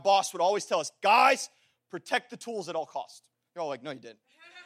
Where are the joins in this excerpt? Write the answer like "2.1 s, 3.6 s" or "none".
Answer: 3.5 s